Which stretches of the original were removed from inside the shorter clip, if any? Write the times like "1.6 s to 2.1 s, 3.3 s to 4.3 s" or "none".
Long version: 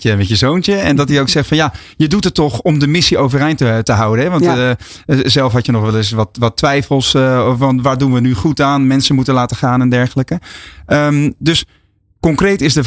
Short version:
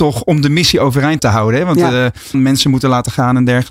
3.6 s to 3.8 s, 5.0 s to 8.8 s